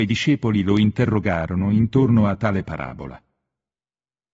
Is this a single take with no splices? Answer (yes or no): yes